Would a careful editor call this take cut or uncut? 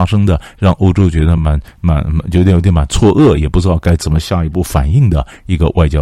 uncut